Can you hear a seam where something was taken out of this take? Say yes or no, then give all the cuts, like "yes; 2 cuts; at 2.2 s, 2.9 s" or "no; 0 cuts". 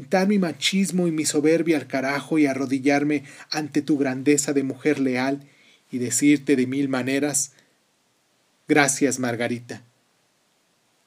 no; 0 cuts